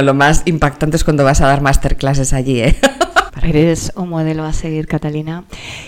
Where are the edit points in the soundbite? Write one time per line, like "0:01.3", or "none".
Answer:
0:03.3